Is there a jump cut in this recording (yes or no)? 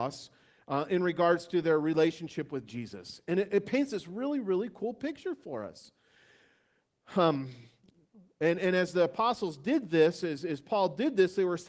no